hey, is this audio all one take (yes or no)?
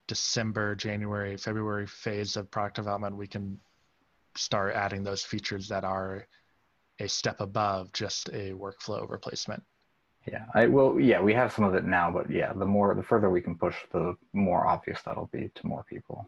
yes